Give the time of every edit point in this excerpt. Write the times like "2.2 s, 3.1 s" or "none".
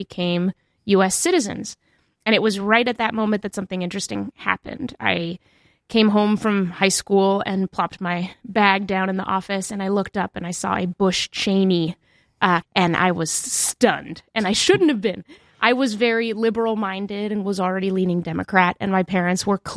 12.6 s